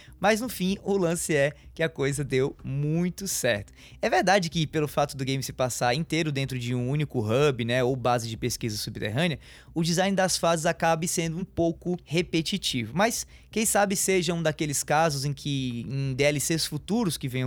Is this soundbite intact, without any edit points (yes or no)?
yes